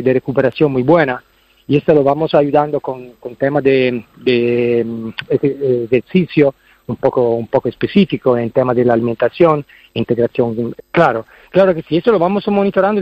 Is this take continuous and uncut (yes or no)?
no